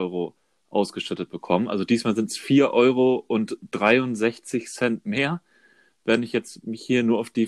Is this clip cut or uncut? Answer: uncut